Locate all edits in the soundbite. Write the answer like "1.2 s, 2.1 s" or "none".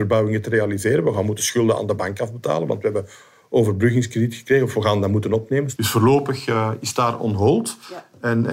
5.8 s